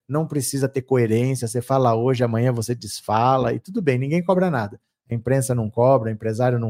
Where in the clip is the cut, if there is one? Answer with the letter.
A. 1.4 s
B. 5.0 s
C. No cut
C